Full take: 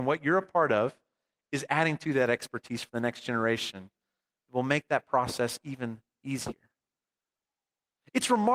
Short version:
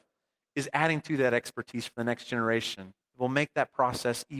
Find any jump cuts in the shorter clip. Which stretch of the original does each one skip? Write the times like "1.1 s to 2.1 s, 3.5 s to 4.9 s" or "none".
4.0 s to 4.4 s